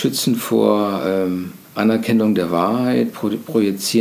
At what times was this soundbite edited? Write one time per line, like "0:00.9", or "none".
0:01.6